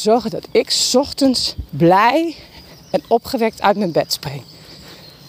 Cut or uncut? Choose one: cut